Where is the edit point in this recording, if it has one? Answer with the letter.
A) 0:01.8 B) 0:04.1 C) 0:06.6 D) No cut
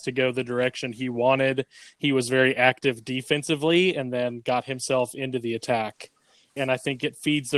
C